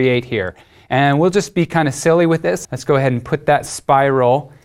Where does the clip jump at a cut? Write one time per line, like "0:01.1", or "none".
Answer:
0:02.6